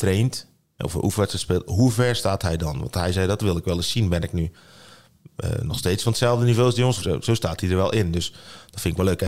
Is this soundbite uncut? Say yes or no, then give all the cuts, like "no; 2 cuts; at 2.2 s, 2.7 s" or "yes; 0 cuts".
no; 1 cut; at 7.0 s